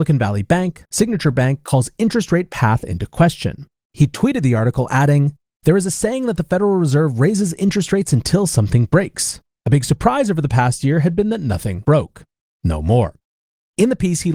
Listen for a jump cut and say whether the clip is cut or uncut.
uncut